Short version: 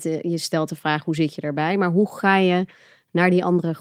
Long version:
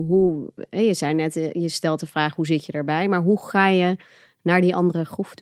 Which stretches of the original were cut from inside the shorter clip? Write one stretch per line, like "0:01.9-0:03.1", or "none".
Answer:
none